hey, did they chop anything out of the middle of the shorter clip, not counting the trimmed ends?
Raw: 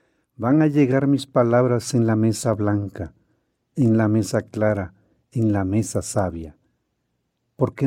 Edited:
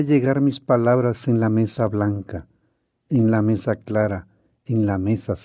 no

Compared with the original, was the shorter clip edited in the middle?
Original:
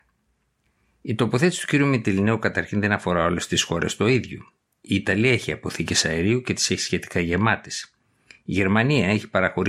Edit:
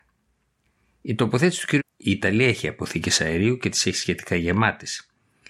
yes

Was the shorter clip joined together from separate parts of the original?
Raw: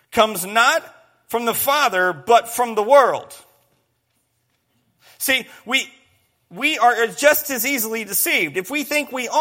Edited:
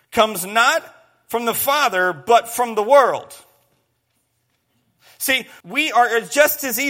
yes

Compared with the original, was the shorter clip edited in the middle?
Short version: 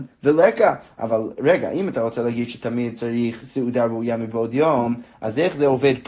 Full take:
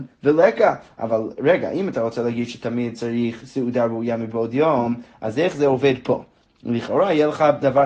no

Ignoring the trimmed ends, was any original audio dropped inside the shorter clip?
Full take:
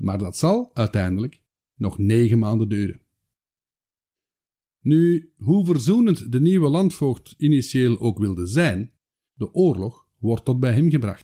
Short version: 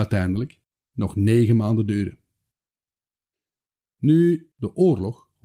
yes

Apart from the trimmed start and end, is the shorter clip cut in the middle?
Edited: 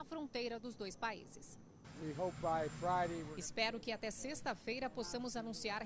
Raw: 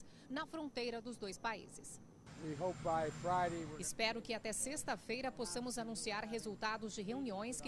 no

